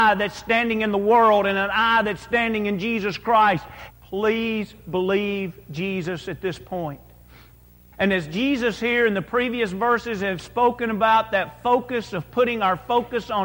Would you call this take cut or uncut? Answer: cut